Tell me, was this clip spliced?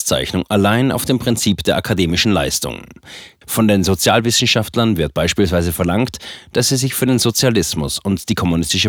yes; 1 cut; at 3.4 s

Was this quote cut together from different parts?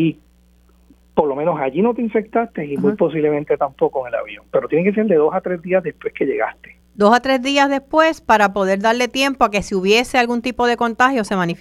no; 0 cuts

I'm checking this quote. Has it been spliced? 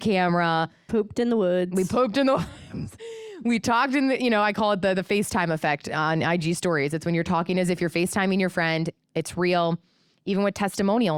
no; 0 cuts

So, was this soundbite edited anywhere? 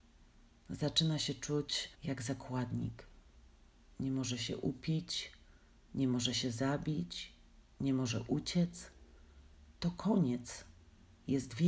yes; 1 cut; at 1.9 s

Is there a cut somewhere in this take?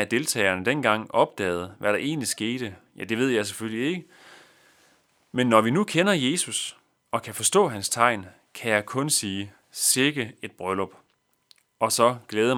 no; 0 cuts

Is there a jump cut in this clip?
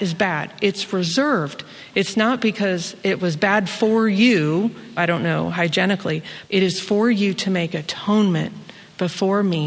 yes; 2 cuts; at 5.0 s, 6.4 s

